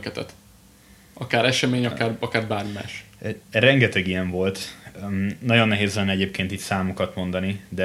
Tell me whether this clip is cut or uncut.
uncut